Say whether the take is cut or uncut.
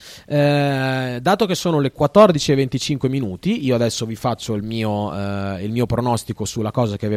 uncut